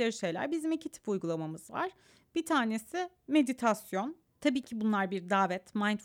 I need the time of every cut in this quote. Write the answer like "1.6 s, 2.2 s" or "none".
4.2 s